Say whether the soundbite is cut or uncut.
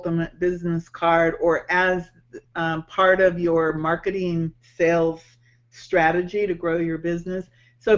uncut